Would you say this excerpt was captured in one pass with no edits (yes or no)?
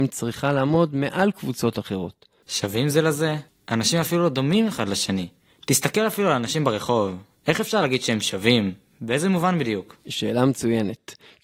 no